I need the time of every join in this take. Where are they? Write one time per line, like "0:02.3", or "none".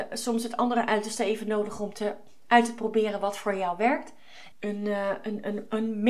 0:04.5